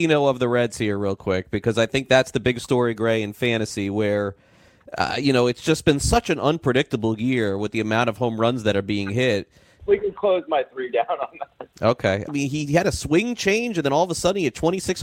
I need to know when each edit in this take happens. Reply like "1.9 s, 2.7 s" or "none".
9.8 s, 12.3 s